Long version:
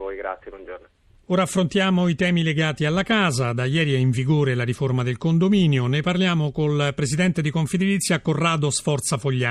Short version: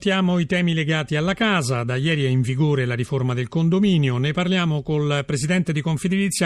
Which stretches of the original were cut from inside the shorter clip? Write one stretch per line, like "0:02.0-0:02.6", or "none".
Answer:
none